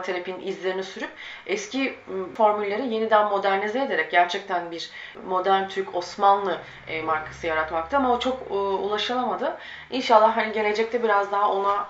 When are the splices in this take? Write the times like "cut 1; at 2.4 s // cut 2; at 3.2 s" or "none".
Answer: none